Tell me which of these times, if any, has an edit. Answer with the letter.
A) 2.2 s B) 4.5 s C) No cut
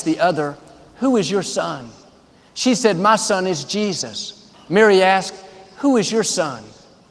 B